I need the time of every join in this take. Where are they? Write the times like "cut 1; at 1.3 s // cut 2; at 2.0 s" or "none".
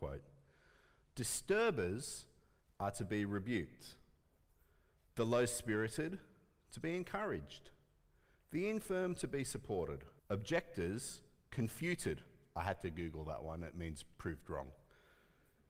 cut 1; at 10.2 s